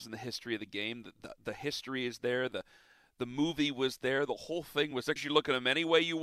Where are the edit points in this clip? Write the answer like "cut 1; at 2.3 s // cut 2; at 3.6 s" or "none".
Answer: cut 1; at 5.2 s